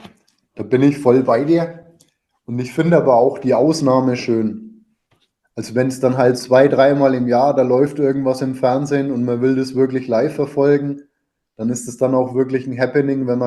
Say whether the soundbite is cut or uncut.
cut